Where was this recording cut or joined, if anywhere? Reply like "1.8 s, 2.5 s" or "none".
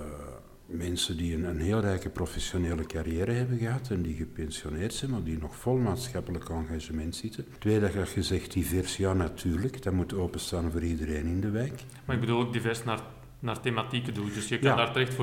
none